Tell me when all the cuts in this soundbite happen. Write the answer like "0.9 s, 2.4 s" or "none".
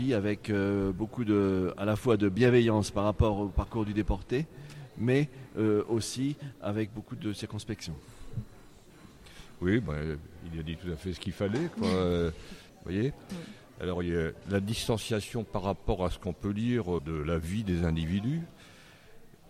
12.7 s, 17.0 s